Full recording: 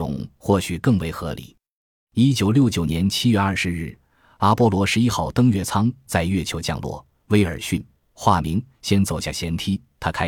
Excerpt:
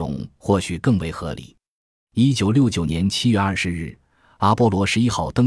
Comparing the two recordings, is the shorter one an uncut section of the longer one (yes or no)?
yes